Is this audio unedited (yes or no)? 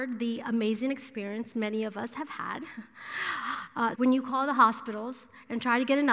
no